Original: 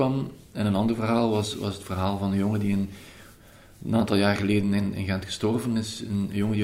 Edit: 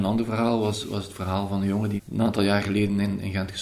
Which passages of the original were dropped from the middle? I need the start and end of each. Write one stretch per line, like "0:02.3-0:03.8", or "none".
0:02.7-0:03.7